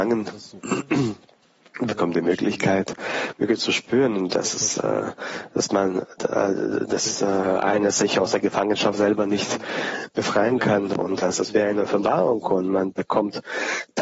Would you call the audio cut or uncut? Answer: uncut